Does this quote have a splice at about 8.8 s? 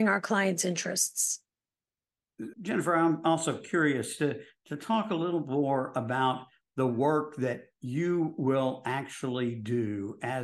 no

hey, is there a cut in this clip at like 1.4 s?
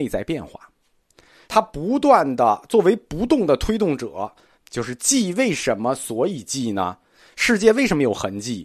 yes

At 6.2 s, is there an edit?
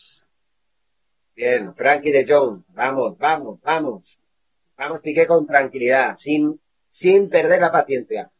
no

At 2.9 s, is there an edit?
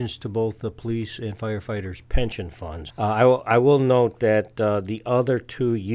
yes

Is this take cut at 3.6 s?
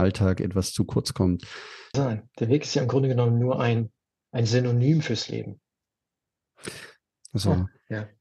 no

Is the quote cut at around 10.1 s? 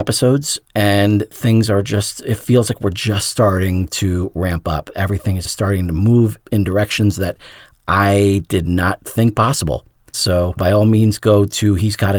yes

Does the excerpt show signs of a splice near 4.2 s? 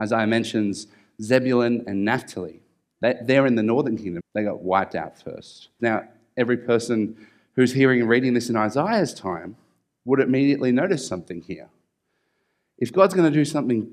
yes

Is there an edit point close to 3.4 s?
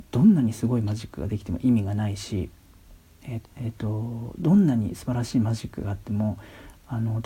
yes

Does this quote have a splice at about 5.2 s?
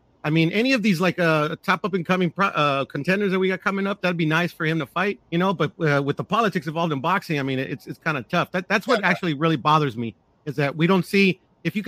yes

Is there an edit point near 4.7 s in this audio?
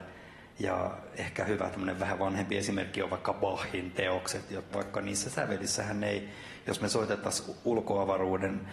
yes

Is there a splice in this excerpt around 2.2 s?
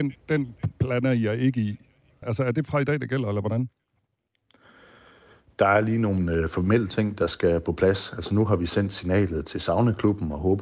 yes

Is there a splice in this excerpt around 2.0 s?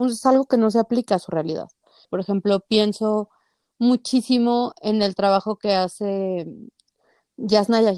yes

